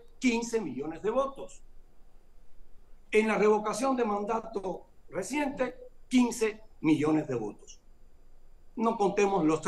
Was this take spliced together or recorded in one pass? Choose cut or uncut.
cut